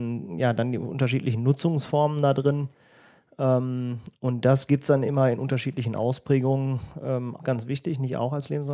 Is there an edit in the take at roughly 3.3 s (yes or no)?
no